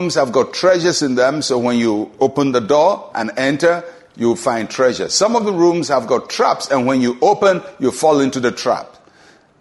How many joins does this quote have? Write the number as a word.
zero